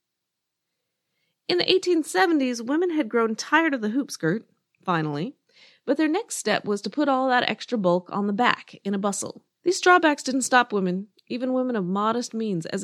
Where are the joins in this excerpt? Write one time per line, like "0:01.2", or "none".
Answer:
0:09.6